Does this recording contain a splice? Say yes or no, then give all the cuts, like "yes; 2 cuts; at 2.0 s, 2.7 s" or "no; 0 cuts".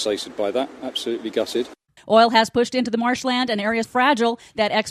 yes; 2 cuts; at 2.0 s, 3.8 s